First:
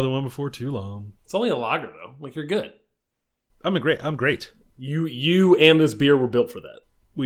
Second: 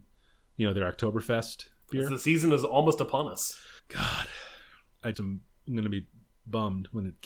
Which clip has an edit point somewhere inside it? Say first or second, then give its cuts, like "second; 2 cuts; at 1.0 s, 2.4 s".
second; 2 cuts; at 3.8 s, 5.1 s